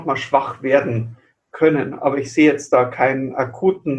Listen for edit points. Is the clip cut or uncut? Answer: uncut